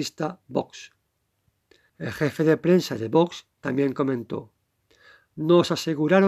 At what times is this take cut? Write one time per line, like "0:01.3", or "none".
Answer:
0:01.9